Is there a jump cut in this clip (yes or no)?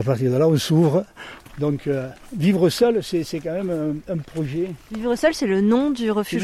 no